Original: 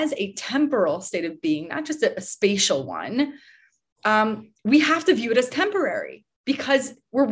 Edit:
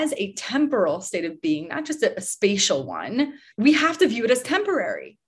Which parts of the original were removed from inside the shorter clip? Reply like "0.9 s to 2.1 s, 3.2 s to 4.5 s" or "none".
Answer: 3.5 s to 4.6 s

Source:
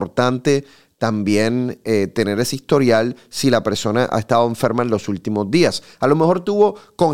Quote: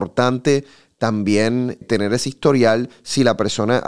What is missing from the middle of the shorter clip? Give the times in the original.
1.8 s to 2.1 s

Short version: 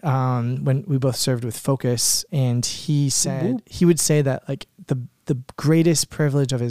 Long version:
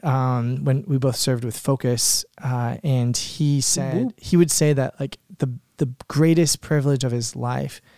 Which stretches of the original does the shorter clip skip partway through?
2.3 s to 2.8 s

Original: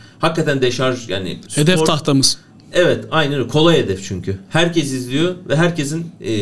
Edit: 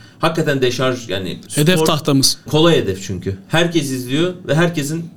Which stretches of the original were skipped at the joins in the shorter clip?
2.5 s to 3.5 s

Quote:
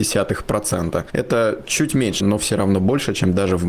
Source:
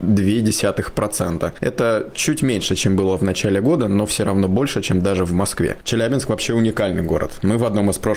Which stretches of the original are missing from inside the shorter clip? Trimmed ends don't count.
2.7 s to 3.9 s

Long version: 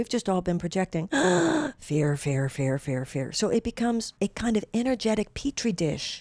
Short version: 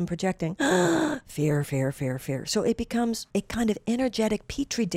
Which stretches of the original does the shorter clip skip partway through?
2.2 s to 2.5 s

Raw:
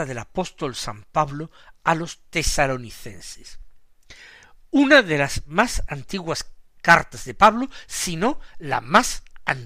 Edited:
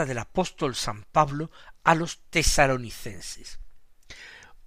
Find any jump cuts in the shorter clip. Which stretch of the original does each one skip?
none

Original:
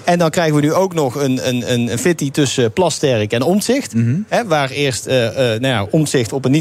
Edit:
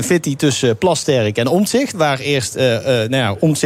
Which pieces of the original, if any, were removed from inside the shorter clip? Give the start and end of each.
3.9 s to 4.4 s

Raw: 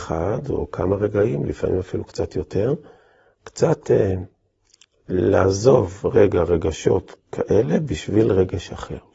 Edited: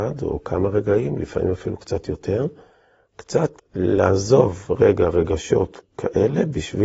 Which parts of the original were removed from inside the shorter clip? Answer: 3.8 s to 4.9 s

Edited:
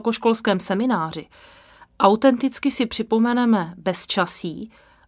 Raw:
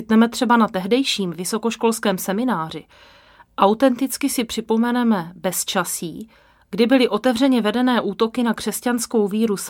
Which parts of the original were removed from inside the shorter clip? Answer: none

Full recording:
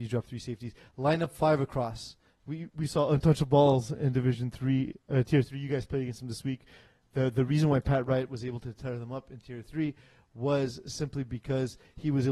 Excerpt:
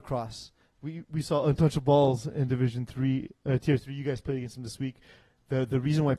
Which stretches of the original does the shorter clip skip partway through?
none

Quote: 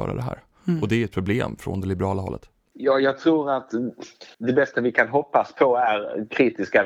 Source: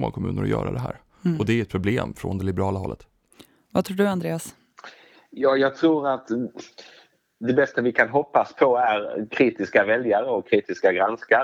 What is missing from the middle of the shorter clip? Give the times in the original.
3.3 s to 5.3 s, 6.9 s to 7.3 s

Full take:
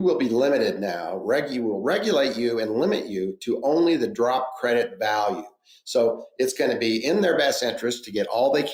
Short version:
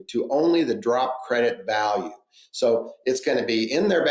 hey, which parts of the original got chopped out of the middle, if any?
none

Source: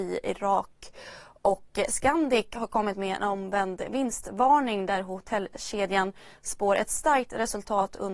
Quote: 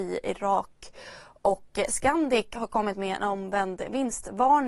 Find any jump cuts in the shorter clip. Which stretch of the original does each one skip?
none

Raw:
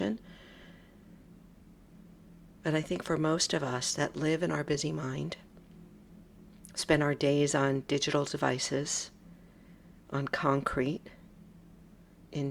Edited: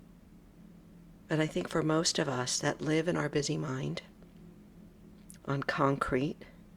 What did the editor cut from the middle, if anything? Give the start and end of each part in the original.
6.7 s to 10.0 s

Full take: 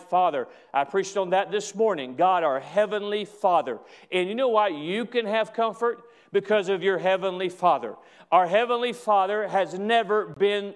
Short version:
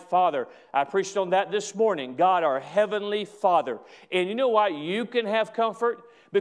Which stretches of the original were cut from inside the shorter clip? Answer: none

